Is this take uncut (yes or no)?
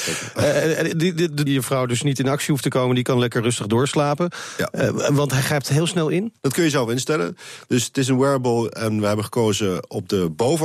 no